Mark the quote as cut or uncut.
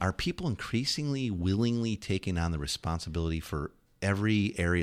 uncut